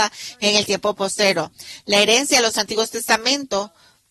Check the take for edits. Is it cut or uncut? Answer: uncut